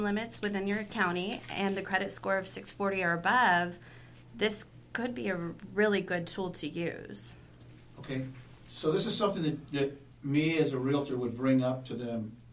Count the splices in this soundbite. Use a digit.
1